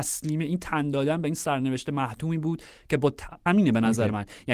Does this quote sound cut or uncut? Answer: cut